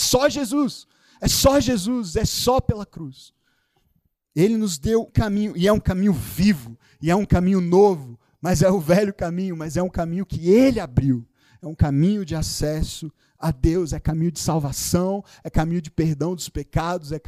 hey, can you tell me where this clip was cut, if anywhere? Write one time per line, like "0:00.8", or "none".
0:05.1